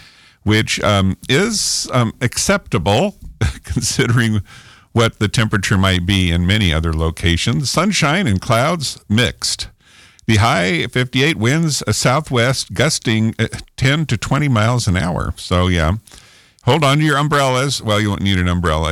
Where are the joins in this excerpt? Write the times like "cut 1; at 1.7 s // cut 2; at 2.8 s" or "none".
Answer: none